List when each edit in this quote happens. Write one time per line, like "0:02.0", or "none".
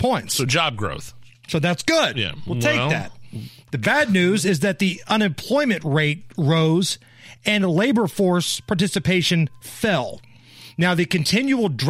none